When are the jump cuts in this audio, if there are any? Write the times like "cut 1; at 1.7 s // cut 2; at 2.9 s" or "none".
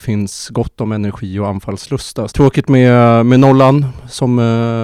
cut 1; at 2.3 s